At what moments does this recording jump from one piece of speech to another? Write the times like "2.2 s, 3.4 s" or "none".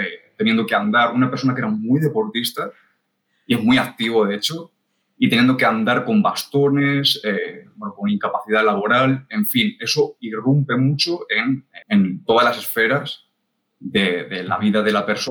11.8 s

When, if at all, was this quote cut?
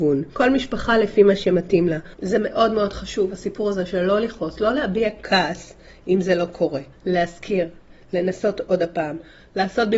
2.1 s

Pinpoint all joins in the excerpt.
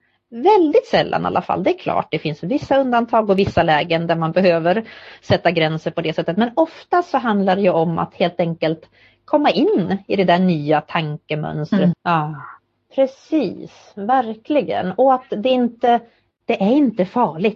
11.9 s

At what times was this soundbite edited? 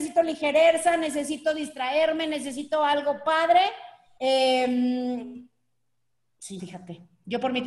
4.2 s, 6.6 s

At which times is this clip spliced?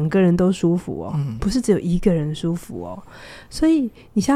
none

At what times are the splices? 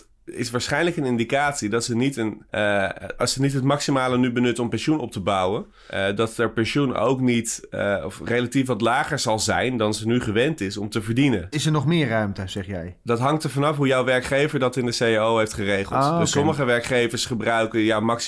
2.5 s, 11.5 s

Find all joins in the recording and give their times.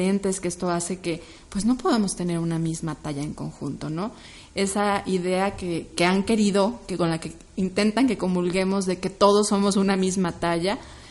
4.4 s, 5.9 s

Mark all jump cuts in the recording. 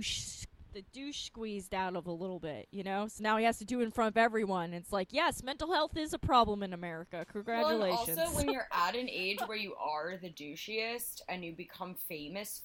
none

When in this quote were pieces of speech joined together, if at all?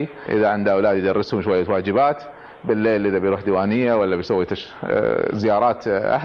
none

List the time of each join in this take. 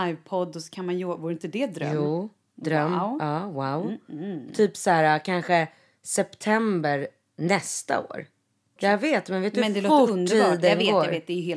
8.8 s

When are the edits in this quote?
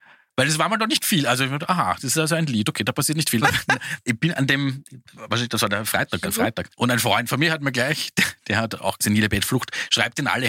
3.4 s, 6.2 s, 9.0 s

